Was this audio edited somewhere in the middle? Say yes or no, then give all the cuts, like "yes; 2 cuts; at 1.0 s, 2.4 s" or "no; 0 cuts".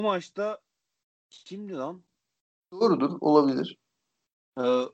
yes; 1 cut; at 2.6 s